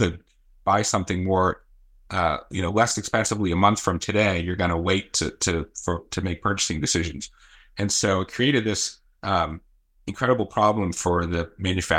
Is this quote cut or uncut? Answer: uncut